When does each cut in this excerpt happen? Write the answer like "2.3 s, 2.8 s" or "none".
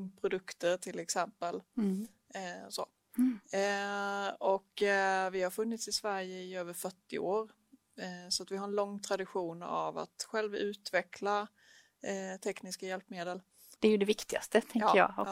13.8 s